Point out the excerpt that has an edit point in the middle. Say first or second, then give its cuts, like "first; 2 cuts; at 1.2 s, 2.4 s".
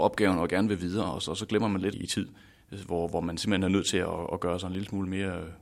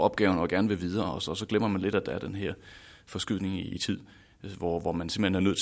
first; 1 cut; at 1.9 s